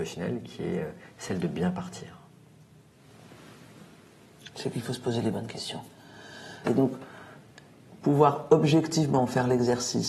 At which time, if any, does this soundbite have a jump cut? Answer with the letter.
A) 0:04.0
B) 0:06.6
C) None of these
B